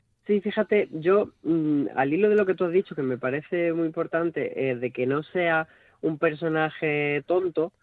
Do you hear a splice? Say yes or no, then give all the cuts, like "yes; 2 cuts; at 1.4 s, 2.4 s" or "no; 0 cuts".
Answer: no; 0 cuts